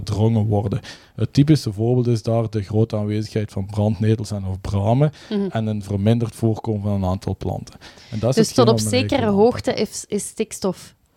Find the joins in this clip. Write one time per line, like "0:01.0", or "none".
none